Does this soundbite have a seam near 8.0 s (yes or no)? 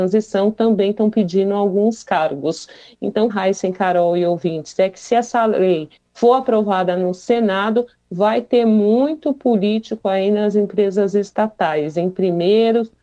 no